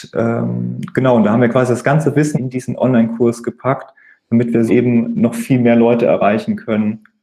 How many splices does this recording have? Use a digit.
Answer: 2